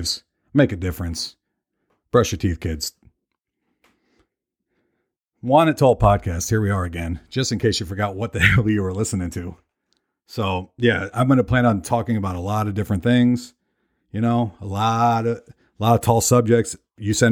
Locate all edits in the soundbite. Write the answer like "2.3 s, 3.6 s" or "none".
11.1 s